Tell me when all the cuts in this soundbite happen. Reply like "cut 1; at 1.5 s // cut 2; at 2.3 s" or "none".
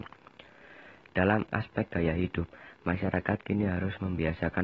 none